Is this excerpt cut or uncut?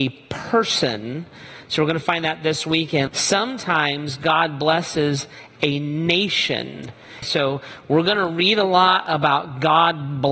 cut